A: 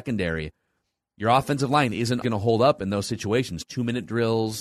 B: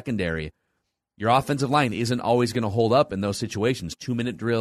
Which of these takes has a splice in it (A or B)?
A